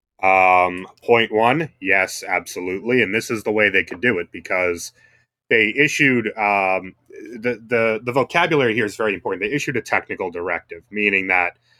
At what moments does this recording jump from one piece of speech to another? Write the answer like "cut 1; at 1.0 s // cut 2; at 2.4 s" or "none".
none